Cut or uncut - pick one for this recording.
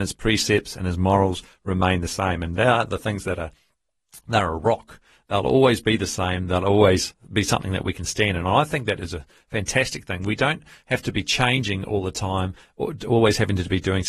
uncut